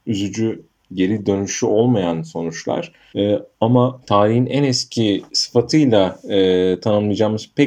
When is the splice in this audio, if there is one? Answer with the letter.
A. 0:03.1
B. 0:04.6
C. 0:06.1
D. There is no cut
A